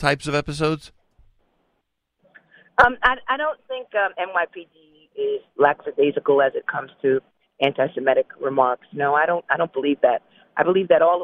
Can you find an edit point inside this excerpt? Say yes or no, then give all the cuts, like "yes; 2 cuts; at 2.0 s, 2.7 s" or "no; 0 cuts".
no; 0 cuts